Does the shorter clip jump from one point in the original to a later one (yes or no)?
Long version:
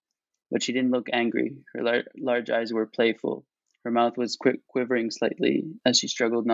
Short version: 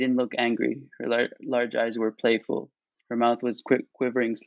no